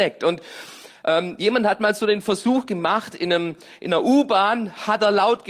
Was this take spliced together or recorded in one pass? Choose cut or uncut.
uncut